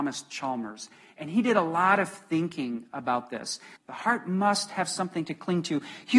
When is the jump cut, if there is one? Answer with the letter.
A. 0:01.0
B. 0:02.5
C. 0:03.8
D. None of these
C